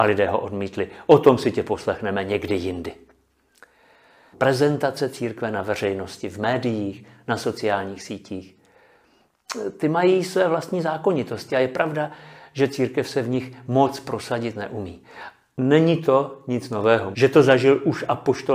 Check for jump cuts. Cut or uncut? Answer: cut